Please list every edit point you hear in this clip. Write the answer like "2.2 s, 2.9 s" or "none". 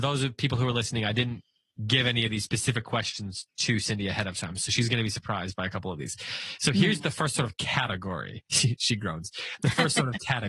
none